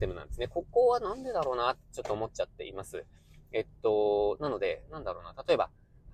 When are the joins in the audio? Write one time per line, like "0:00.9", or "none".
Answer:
none